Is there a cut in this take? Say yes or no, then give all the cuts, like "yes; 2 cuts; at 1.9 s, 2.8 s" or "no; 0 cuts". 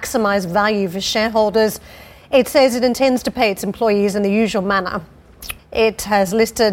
yes; 1 cut; at 5.6 s